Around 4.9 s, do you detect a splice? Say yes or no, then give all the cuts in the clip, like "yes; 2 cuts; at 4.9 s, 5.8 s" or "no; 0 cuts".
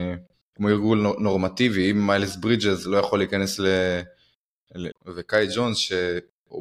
yes; 1 cut; at 4.9 s